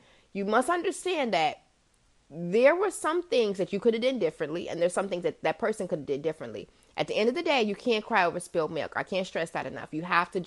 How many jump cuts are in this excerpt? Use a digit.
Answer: 0